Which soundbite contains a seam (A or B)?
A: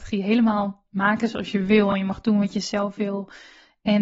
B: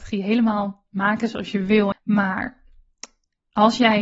B